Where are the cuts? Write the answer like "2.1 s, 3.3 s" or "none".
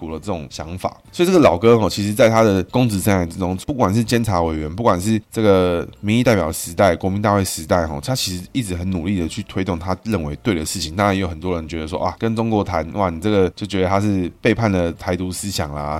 none